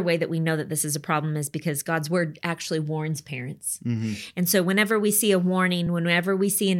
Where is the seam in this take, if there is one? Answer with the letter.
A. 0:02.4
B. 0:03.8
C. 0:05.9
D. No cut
D